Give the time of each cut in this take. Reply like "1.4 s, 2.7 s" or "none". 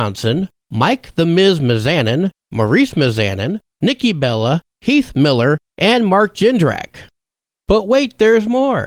none